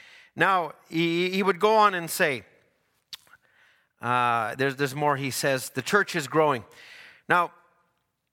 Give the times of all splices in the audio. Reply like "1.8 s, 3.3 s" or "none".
none